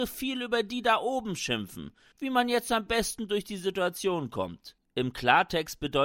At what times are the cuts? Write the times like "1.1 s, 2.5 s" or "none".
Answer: 2.1 s